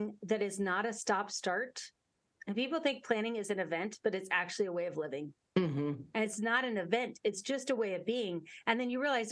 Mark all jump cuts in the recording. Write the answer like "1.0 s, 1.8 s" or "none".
5.5 s